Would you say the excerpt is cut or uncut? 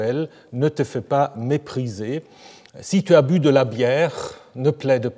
uncut